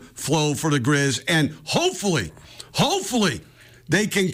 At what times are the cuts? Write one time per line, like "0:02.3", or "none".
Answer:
none